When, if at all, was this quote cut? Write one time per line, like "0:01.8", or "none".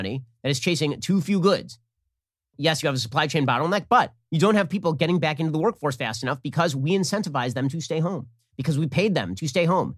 0:02.5